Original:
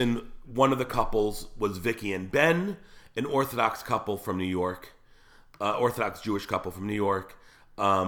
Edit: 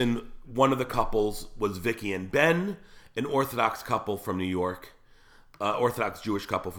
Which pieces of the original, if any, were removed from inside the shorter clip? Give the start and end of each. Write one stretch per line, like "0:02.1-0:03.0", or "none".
none